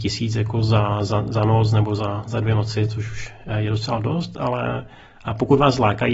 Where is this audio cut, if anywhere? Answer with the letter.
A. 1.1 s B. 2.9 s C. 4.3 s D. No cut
D